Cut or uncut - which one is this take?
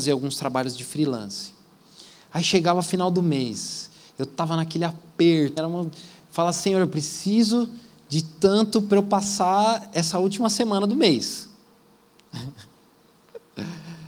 cut